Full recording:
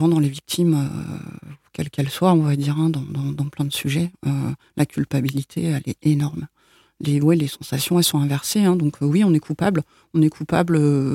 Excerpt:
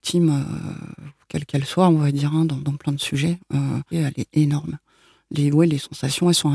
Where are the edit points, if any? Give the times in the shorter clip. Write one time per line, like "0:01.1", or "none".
0:02.6
0:03.9